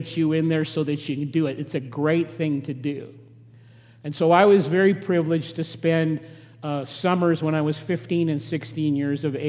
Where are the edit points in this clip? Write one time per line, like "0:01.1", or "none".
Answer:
none

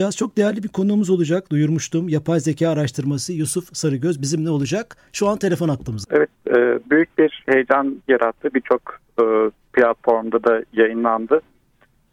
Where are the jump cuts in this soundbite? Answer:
0:06.0

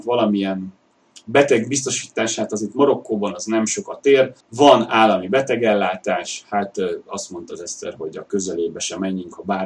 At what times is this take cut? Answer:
0:04.4

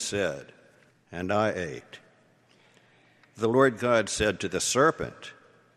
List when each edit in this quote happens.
0:00.9

